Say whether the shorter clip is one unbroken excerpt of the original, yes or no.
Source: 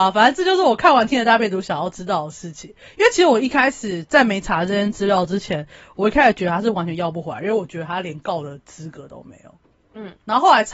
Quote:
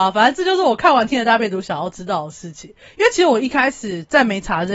yes